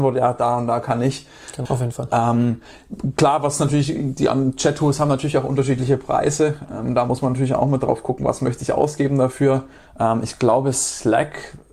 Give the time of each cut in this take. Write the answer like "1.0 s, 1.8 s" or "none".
1.6 s